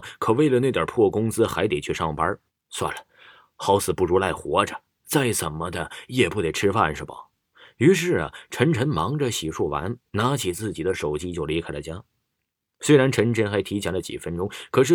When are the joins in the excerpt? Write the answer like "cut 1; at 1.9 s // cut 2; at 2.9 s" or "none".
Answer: cut 1; at 2.5 s

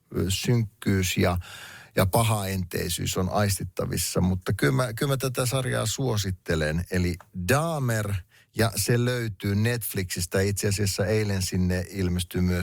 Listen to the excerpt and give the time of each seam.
none

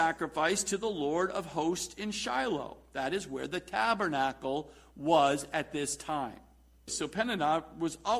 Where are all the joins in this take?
cut 1; at 6.9 s

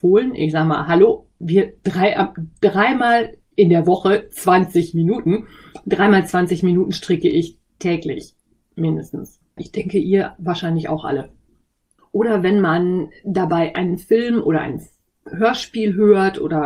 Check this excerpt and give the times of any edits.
cut 1; at 9.6 s // cut 2; at 12.0 s

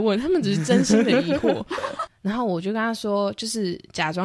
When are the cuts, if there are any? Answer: cut 1; at 2.1 s

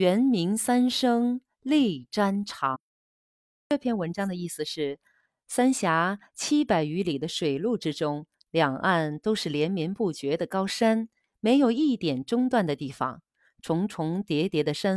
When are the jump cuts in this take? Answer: none

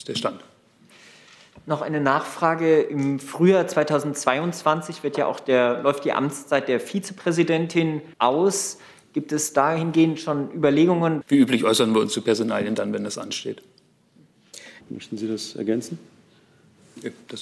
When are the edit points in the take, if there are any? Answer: cut 1; at 8.1 s // cut 2; at 11.2 s // cut 3; at 14.8 s

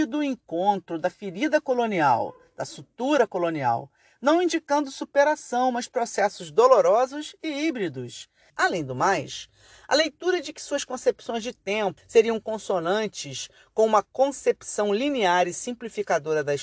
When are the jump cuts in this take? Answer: cut 1; at 8.5 s // cut 2; at 12.0 s

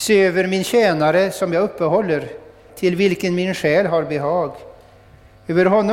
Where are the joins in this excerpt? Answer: cut 1; at 2.7 s

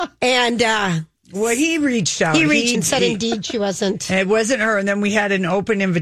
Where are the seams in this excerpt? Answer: cut 1; at 2.7 s

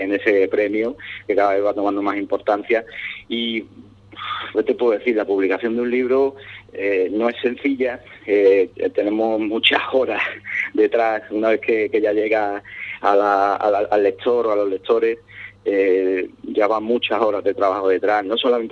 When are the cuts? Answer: cut 1; at 4.5 s

